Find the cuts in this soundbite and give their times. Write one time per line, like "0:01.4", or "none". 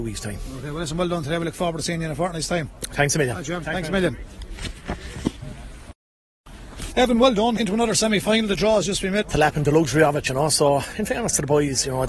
0:03.6
0:07.6
0:09.2